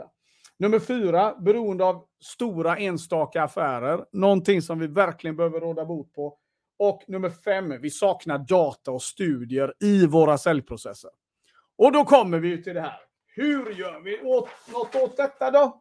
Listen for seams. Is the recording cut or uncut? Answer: uncut